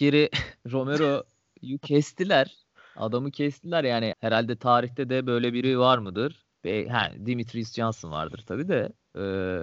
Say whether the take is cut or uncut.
cut